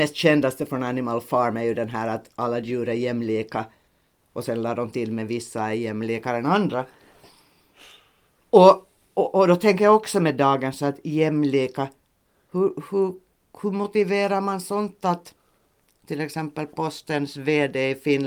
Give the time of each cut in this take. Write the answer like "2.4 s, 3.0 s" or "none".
none